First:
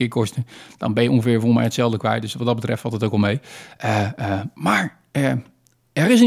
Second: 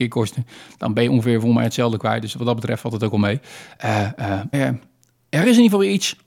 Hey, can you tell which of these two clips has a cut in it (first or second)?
second